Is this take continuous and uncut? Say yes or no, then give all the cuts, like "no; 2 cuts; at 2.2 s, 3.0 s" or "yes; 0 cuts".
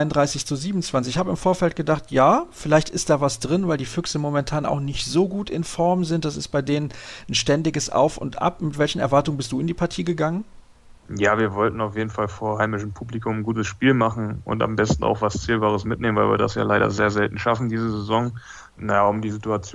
yes; 0 cuts